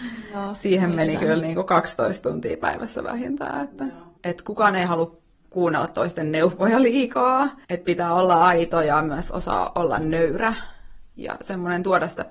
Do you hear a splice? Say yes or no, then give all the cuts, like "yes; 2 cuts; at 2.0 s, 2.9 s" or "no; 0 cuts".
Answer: yes; 2 cuts; at 4.2 s, 7.6 s